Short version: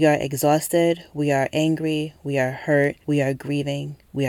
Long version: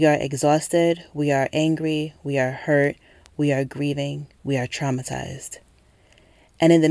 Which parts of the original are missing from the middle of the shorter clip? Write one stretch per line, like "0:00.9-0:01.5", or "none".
0:03.0-0:03.3